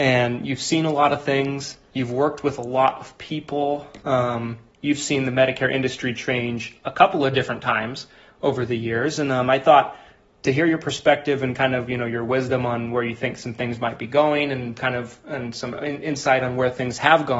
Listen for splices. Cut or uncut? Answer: uncut